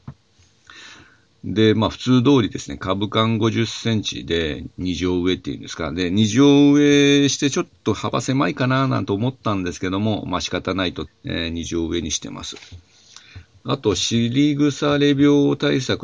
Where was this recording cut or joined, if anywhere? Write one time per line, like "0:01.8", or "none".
0:11.1

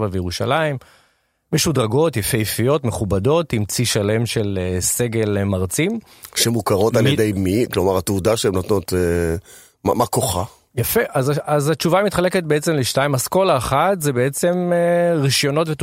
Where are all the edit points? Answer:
none

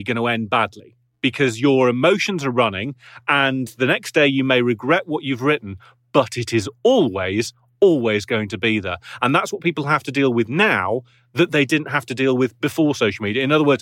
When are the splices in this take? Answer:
none

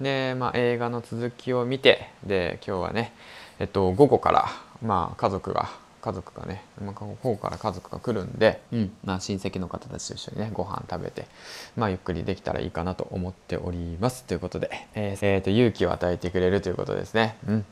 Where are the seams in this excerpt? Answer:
0:08.6
0:15.2

